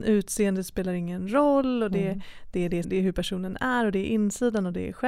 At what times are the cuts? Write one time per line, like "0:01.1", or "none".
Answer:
0:02.8